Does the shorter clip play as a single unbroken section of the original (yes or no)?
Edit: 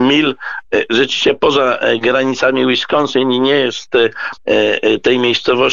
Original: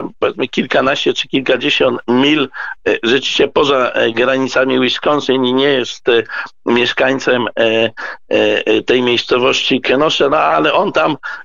no